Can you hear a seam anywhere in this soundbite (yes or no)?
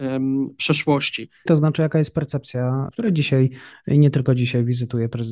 yes